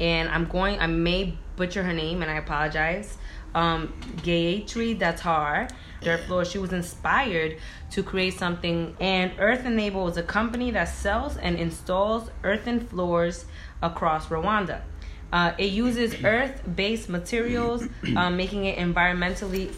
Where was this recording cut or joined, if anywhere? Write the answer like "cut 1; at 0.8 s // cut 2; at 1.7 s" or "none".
cut 1; at 6.0 s // cut 2; at 8.9 s